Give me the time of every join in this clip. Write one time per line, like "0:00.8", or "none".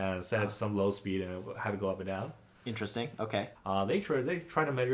0:03.6